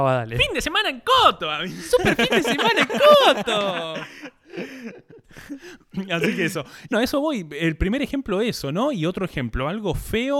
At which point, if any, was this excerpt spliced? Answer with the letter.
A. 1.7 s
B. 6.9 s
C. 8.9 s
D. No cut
B